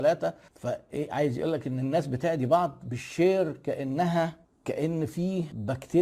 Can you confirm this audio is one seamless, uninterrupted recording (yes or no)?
yes